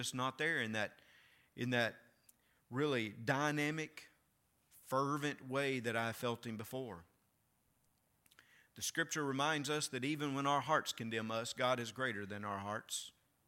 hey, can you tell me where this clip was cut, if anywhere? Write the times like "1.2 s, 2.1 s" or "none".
none